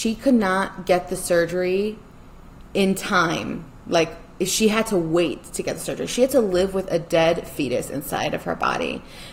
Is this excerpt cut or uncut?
uncut